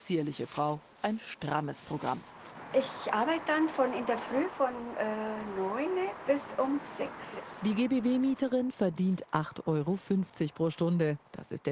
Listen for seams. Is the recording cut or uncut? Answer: uncut